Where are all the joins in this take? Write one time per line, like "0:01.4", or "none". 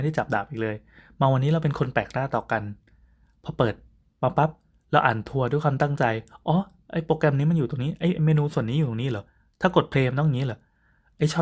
none